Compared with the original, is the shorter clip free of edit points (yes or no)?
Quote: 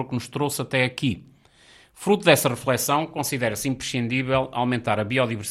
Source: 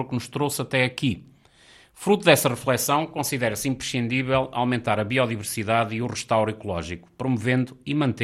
yes